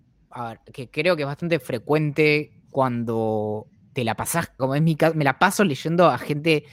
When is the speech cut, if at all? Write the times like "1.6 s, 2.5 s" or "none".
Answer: 2.6 s, 4.6 s